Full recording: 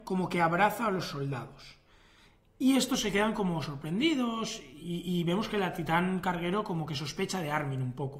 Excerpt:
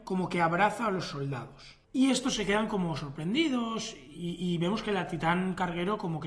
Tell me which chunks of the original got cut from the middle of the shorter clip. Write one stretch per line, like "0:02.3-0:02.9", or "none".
0:01.8-0:02.5